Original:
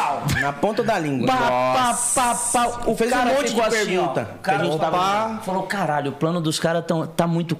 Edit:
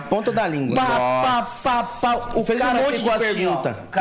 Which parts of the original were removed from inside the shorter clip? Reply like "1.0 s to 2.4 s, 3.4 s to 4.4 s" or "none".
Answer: none